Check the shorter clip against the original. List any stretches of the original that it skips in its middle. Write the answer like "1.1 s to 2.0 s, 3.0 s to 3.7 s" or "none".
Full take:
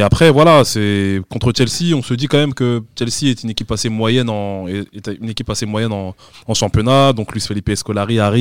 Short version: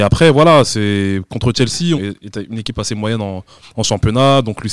2.0 s to 4.7 s